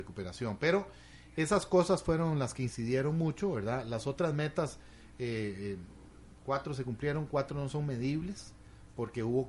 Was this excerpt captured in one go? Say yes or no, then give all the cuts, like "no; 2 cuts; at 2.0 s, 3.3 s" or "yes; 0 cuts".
yes; 0 cuts